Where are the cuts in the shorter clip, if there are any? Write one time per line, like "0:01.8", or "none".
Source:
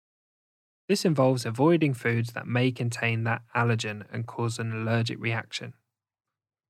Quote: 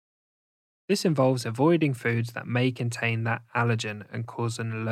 none

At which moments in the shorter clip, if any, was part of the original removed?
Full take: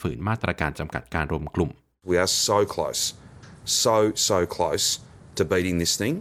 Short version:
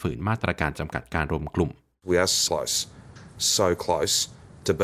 0:02.5
0:03.6

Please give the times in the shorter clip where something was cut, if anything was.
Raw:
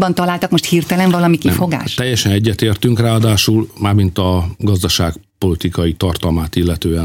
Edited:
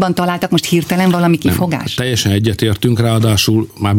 none

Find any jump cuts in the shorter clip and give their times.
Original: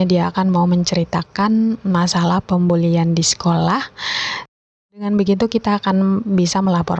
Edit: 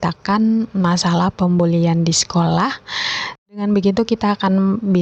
0:03.4

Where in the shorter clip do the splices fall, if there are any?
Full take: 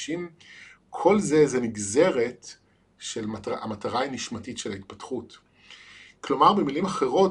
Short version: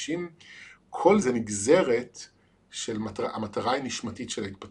0:01.2

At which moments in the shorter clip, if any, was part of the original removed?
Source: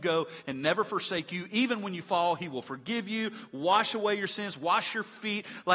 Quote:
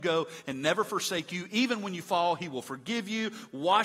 none

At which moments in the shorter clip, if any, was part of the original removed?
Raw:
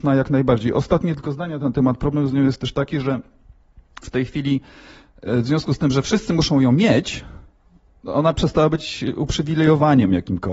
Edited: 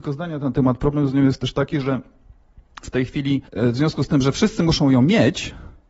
0:03.5

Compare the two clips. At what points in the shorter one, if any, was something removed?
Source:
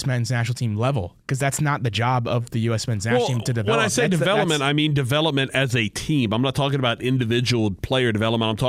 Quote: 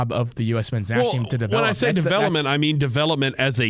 none

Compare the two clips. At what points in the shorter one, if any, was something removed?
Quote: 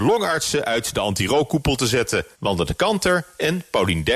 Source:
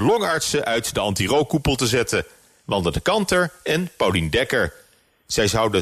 0:02.3

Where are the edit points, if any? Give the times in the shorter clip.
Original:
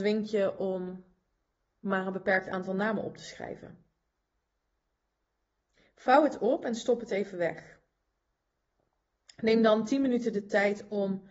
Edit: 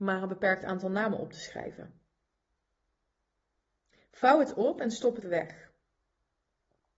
0:05.2

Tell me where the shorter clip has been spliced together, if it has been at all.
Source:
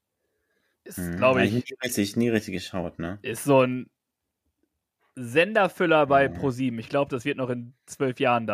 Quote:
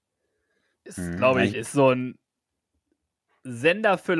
0:01.5

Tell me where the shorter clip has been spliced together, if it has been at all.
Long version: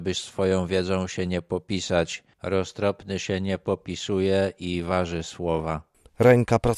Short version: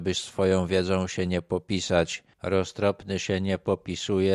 none

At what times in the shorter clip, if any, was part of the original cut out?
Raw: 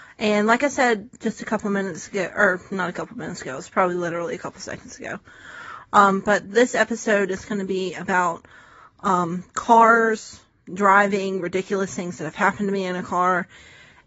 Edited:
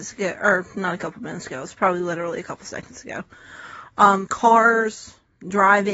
0:04.3

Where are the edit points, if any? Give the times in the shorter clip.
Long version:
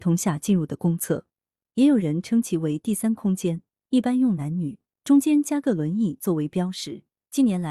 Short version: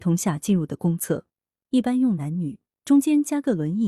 0:01.7

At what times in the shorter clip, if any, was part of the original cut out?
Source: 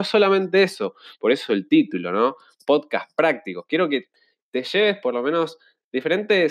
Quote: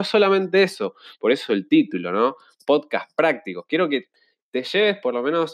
none

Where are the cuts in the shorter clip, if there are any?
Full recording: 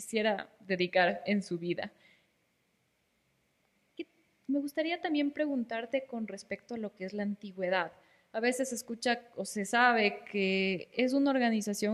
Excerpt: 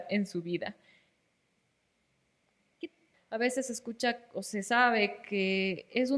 0:03.1

